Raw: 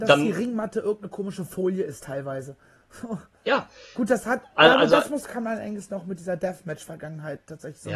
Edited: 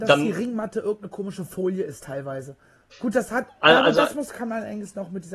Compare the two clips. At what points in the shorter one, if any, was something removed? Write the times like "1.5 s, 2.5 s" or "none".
2.9 s